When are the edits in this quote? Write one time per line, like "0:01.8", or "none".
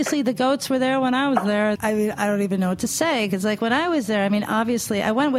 0:01.8